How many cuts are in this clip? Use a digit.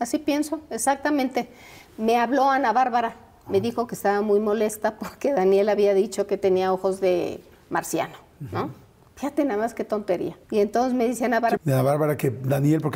2